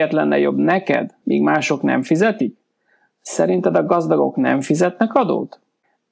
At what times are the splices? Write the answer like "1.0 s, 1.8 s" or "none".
1.2 s